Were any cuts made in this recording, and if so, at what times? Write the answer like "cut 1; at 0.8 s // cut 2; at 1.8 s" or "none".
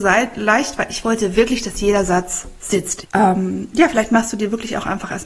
cut 1; at 3.0 s

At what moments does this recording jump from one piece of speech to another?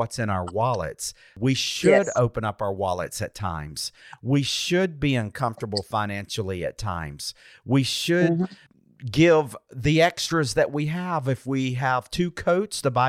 none

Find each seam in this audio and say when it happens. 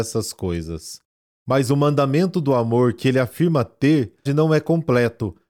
cut 1; at 4.3 s

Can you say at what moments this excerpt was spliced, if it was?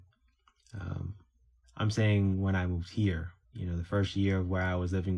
cut 1; at 1.6 s // cut 2; at 3.4 s

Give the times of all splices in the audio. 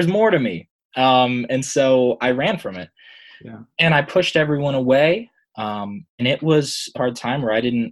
cut 1; at 5.4 s // cut 2; at 7.0 s

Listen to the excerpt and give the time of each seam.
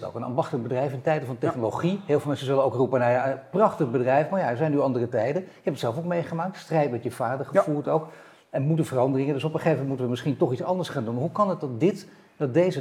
none

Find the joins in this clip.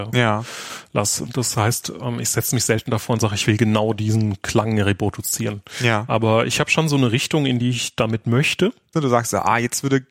cut 1; at 1.3 s // cut 2; at 8.9 s

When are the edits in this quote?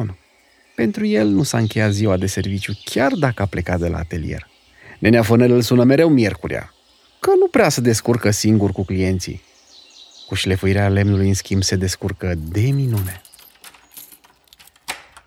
none

